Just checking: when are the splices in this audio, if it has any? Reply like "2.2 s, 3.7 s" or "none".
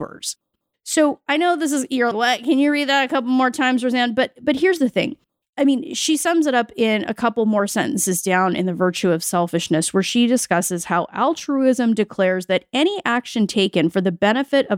2.1 s